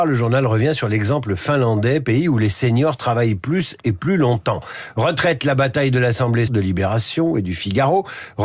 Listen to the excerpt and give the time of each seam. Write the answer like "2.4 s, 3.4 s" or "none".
6.5 s